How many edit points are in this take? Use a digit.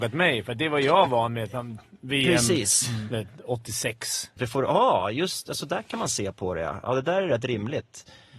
1